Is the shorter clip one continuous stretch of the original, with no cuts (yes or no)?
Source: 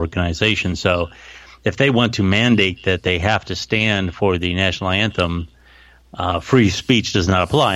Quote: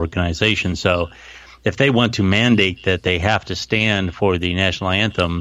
yes